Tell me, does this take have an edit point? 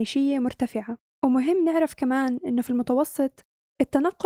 no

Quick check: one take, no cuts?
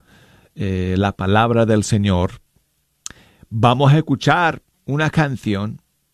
yes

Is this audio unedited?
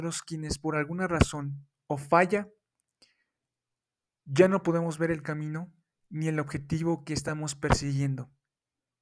yes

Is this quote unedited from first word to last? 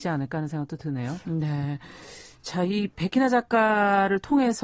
no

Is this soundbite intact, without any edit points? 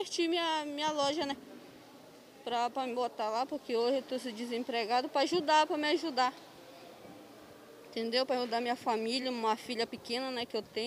yes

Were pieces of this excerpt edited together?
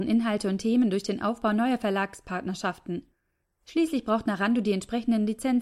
no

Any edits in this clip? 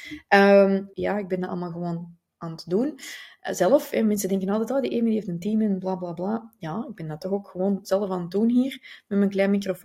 yes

